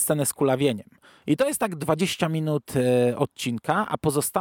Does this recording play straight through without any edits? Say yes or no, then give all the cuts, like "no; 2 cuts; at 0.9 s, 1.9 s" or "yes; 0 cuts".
no; 1 cut; at 1.2 s